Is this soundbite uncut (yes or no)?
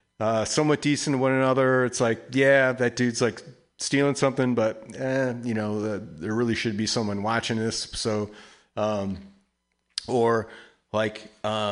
yes